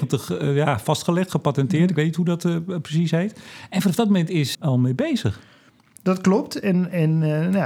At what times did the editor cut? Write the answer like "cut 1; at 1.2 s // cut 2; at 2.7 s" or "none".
cut 1; at 4.5 s